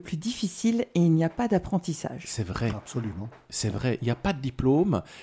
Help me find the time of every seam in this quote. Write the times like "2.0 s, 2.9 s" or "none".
none